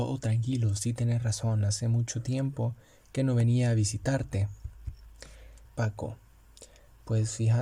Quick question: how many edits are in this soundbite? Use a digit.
1